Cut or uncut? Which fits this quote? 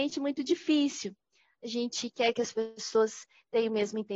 uncut